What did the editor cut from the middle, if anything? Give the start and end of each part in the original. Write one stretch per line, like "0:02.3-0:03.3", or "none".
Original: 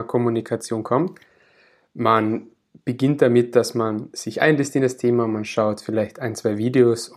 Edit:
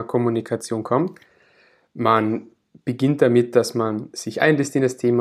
none